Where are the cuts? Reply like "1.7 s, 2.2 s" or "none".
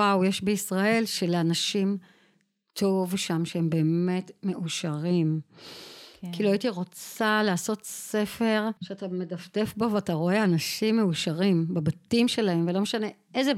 8.8 s